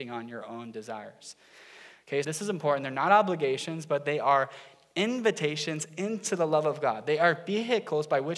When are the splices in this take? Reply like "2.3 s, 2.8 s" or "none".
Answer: 2.2 s